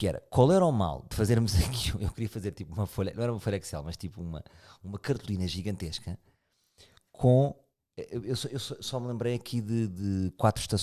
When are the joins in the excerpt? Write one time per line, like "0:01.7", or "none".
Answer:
none